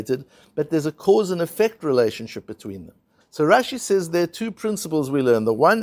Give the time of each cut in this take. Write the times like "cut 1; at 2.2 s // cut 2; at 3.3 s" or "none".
cut 1; at 3.2 s